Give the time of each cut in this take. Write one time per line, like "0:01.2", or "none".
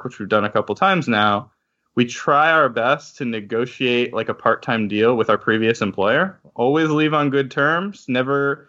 none